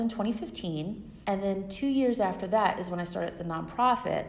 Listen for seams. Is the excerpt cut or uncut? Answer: cut